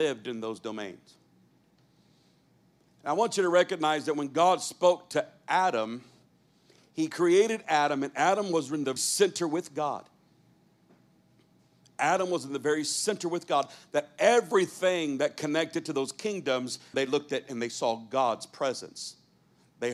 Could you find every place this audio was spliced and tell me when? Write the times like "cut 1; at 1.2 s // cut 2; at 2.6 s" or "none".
cut 1; at 9.0 s // cut 2; at 16.9 s